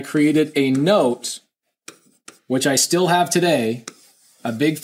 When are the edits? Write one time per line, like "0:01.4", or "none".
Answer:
none